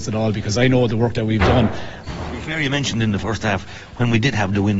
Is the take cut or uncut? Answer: cut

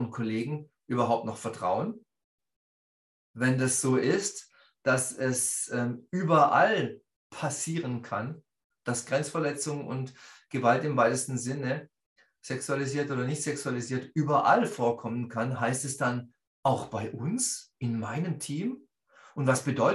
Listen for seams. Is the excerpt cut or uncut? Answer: uncut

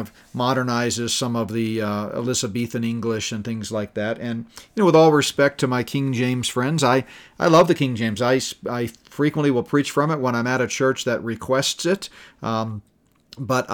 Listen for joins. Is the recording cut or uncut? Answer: uncut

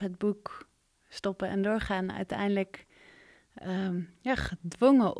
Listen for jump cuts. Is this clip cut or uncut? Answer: uncut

